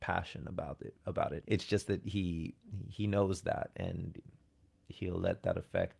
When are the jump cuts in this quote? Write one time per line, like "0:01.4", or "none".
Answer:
0:01.4